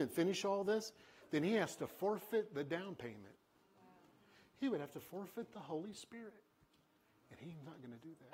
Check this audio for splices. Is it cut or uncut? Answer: uncut